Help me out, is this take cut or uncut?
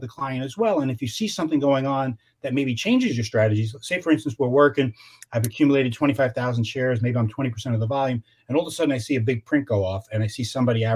uncut